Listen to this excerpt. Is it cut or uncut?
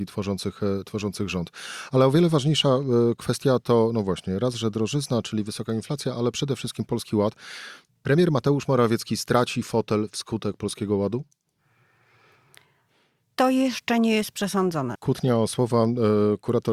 cut